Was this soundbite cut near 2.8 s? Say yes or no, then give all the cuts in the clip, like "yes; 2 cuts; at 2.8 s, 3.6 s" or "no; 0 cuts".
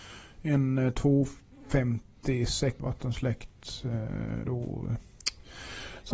yes; 1 cut; at 2.8 s